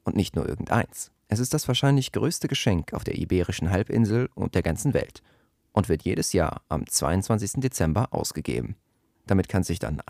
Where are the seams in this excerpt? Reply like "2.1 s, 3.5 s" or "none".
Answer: none

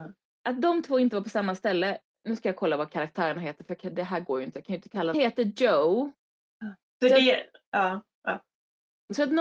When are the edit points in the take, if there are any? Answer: 5.1 s, 6.8 s

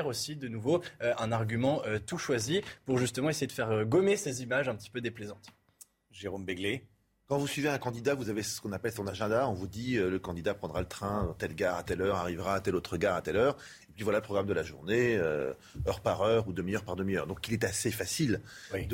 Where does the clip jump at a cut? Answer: none

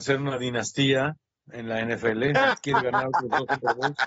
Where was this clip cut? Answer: none

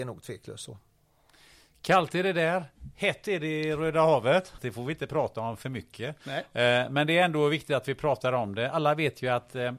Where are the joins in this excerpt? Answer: 4.6 s

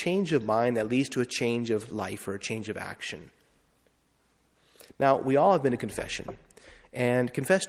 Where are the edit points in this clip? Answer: none

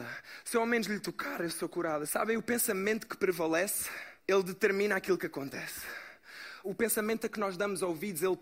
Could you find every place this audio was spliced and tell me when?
2.1 s, 4.2 s, 6.6 s

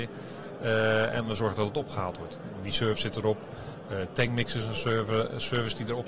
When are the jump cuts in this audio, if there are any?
none

